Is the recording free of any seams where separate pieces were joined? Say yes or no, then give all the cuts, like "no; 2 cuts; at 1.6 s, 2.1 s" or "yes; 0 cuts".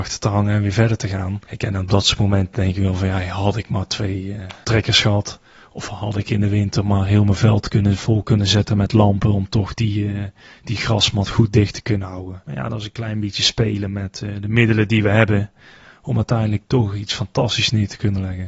yes; 0 cuts